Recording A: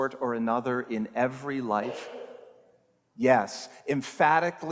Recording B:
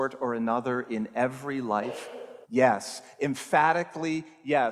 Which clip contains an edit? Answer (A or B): B